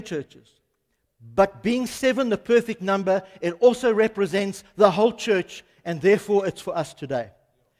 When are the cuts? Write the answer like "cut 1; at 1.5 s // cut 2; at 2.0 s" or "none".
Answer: none